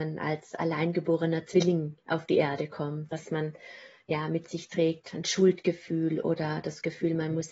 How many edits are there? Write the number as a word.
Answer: one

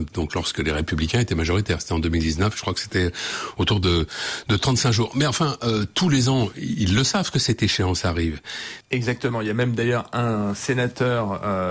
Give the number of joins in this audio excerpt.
one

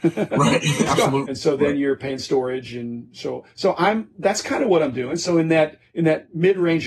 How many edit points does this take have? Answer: one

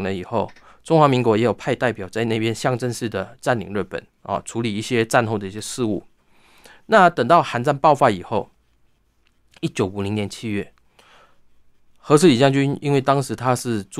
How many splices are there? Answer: zero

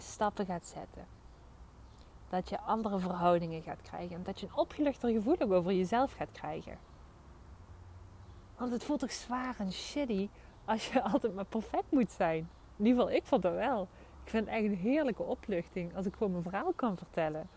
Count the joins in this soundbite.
zero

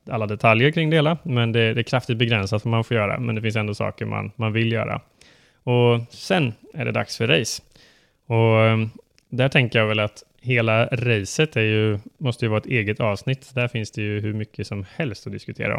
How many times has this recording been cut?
zero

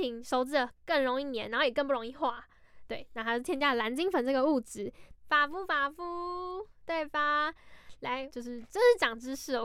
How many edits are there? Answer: two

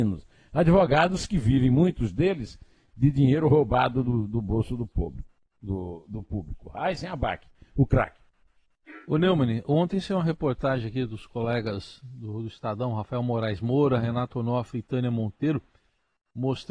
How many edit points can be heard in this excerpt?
zero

